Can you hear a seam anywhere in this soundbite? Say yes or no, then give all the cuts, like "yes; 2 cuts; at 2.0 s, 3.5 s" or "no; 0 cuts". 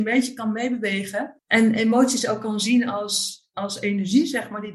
yes; 1 cut; at 1.4 s